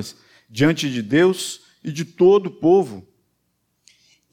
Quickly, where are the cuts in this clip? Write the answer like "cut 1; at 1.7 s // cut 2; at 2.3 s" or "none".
none